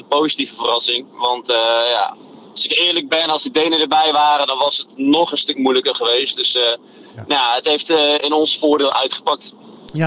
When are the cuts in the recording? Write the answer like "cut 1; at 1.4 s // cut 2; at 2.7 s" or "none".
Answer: none